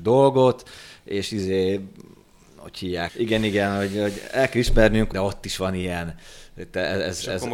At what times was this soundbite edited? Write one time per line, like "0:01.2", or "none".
0:03.1
0:05.1